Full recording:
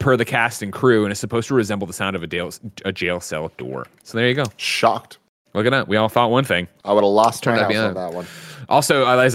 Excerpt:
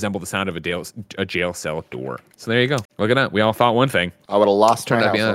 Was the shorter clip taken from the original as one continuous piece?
no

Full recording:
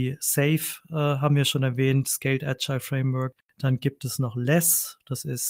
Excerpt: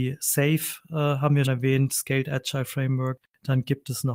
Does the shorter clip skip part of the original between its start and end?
yes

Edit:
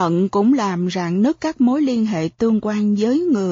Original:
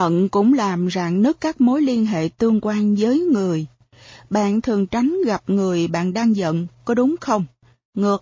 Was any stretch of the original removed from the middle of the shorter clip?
no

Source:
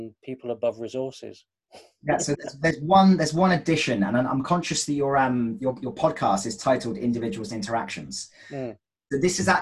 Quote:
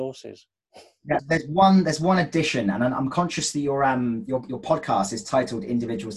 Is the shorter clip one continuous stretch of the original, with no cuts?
no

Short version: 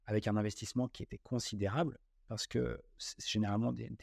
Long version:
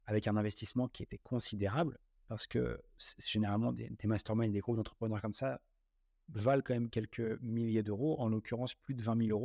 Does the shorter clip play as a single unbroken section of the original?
yes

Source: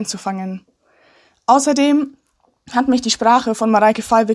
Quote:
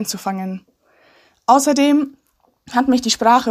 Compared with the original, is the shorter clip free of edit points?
yes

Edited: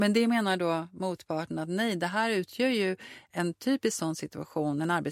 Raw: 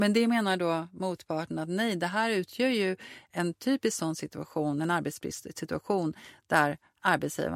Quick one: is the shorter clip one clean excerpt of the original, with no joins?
yes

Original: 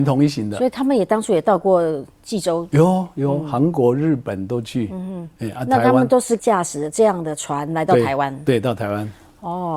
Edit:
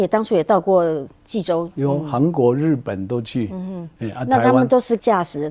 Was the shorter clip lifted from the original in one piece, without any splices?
no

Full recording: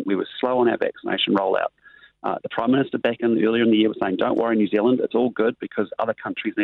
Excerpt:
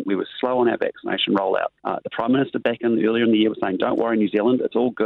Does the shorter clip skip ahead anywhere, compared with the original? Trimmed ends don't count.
yes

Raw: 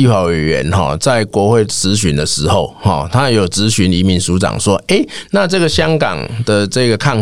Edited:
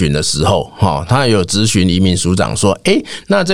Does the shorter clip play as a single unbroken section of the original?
yes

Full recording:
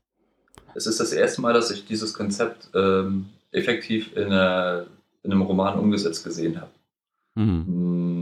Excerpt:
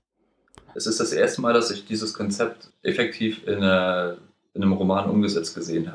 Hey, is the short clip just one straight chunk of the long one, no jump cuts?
no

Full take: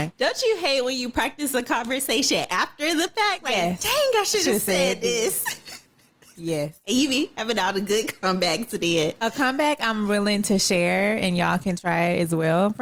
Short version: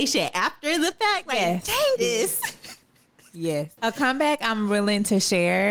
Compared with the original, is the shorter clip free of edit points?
no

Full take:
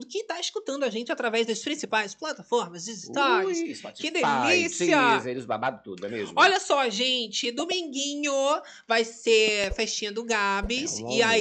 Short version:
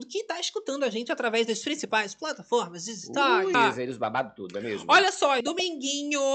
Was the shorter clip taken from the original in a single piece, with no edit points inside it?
no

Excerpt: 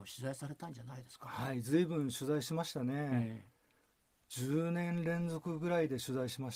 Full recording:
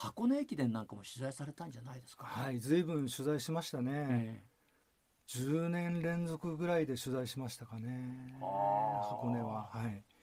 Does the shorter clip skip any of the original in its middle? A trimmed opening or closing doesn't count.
no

